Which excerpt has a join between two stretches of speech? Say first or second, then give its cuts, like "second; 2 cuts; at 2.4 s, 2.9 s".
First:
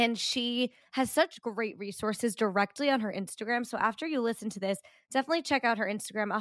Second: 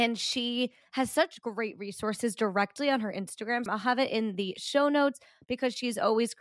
second; 1 cut; at 3.7 s